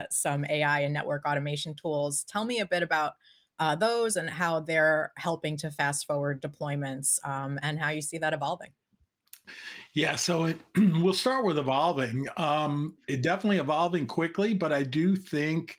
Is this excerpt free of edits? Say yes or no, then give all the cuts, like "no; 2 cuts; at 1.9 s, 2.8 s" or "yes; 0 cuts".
yes; 0 cuts